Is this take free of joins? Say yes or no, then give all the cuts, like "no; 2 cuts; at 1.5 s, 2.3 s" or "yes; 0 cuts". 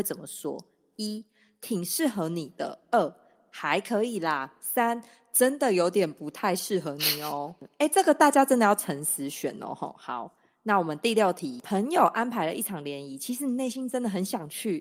yes; 0 cuts